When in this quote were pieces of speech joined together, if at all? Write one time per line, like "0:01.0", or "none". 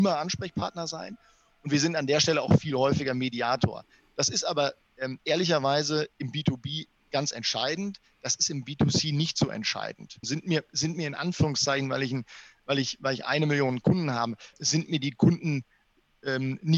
0:10.2
0:14.5